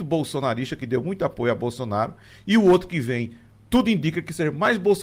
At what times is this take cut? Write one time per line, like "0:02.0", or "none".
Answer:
none